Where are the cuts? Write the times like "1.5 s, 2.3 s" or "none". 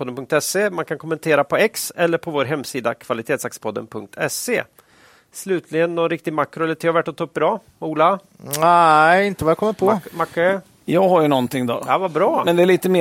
none